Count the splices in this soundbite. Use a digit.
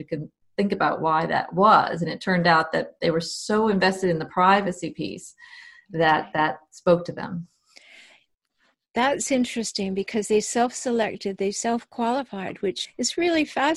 1